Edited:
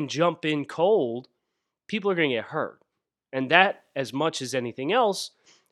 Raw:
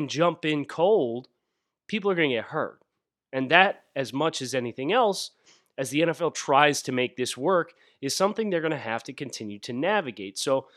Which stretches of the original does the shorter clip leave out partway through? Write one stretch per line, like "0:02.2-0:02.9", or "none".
none